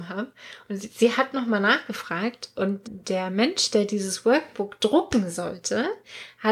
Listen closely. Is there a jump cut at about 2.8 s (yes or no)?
yes